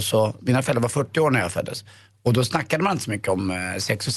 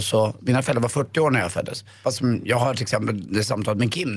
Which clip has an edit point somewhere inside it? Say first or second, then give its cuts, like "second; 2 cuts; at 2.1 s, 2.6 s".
second; 1 cut; at 2.0 s